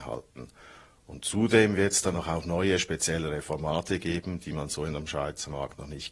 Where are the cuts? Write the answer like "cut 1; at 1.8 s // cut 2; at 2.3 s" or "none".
cut 1; at 2.1 s